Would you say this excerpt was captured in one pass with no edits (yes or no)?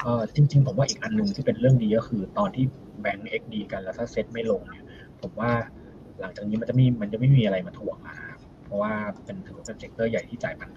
no